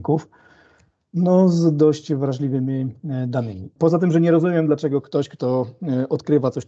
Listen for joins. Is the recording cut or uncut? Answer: cut